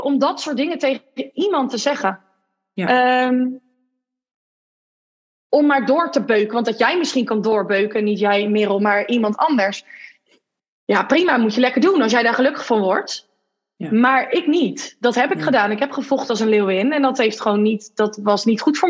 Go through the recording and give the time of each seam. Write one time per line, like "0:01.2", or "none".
none